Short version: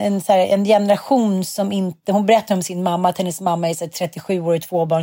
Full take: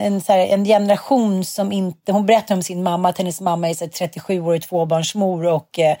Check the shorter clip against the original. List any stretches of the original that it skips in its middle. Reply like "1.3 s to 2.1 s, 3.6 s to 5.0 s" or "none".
none